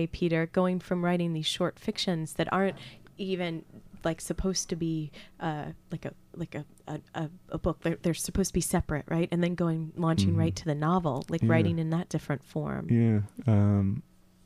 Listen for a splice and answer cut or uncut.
uncut